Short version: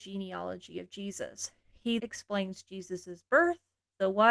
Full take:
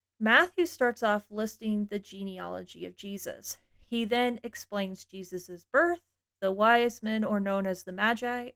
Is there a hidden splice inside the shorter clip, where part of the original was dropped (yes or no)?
yes